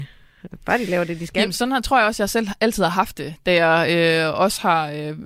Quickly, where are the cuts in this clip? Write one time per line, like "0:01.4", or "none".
none